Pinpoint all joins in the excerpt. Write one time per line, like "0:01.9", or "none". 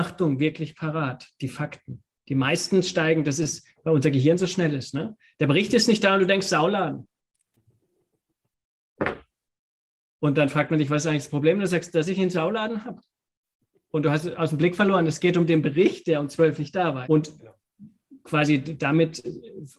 0:17.0